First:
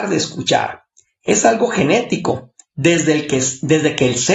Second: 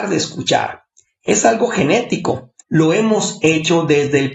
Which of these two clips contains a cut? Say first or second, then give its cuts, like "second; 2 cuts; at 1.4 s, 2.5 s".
second; 1 cut; at 2.6 s